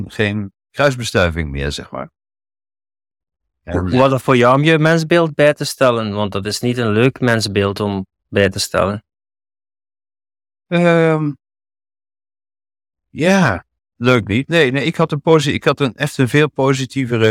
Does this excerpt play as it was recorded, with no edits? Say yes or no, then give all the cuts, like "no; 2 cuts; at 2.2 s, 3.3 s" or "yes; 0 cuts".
no; 1 cut; at 13.8 s